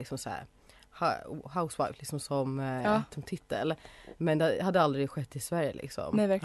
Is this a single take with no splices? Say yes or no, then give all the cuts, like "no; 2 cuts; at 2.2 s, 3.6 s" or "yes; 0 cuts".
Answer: yes; 0 cuts